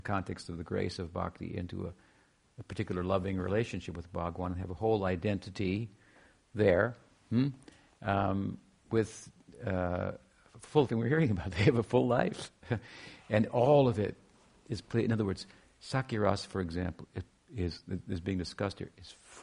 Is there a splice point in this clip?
yes; 1 cut; at 10.9 s

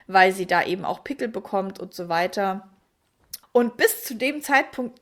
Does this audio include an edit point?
yes; 1 cut; at 3.4 s

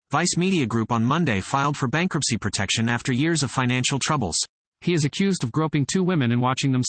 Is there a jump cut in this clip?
yes; 1 cut; at 4.7 s

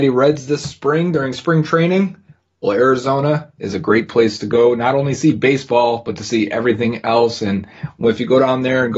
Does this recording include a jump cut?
no; 0 cuts

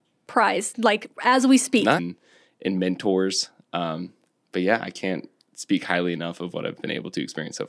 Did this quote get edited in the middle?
yes; 1 cut; at 2.0 s

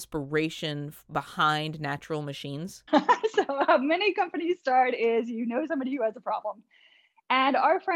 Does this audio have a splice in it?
yes; 1 cut; at 2.9 s

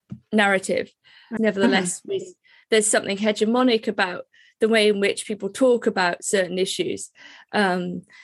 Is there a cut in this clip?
yes; 1 cut; at 1.4 s

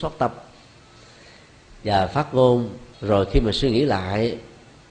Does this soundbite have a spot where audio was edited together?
yes; 1 cut; at 2.9 s

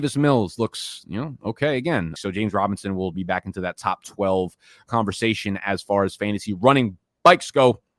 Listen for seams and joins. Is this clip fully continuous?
no; 2 cuts; at 2.1 s, 3.1 s

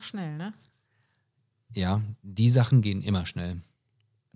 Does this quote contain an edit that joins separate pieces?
yes; 1 cut; at 2.8 s

